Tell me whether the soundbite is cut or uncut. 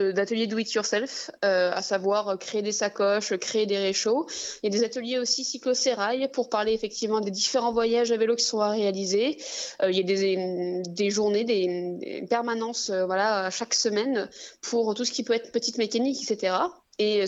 uncut